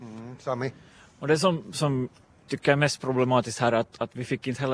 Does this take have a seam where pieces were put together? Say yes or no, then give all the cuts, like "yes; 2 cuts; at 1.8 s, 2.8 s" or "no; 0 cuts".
no; 0 cuts